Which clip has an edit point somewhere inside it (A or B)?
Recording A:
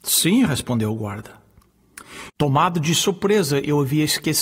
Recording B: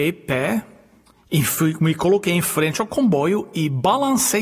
A